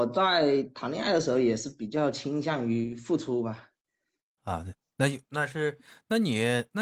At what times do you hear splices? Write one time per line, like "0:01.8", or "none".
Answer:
none

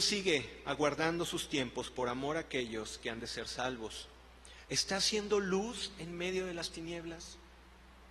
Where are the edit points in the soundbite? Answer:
0:04.6

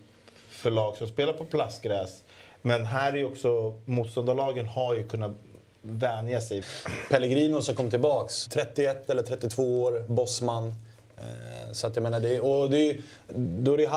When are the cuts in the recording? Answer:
0:06.6
0:08.5

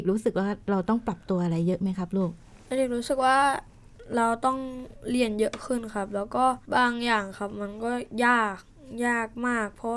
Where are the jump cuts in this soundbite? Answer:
0:06.6

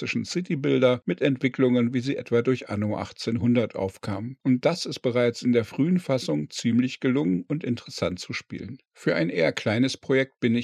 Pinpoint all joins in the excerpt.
0:08.9

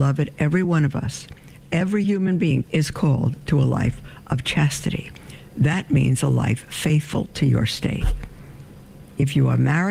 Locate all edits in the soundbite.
0:02.6

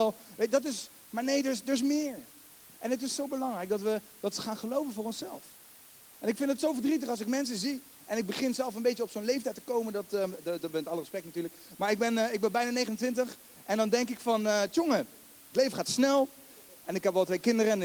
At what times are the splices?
0:16.8

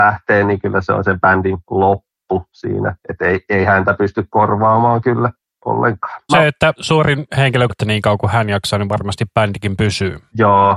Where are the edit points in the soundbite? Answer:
0:06.3
0:07.7

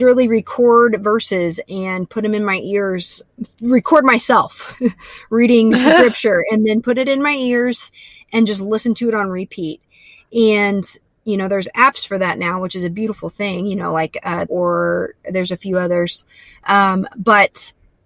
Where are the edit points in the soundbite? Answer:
0:14.5

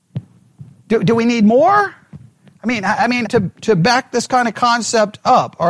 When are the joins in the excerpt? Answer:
0:03.2

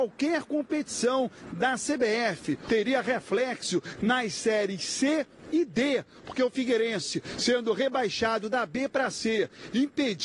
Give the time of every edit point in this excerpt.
0:02.7

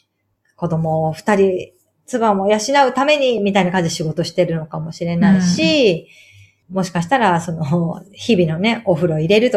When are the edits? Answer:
none

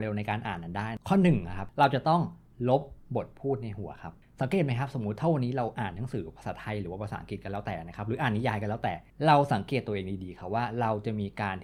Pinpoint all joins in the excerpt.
none

